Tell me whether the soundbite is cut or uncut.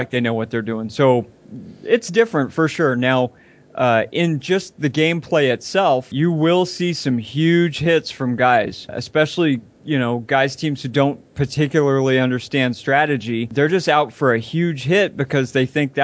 uncut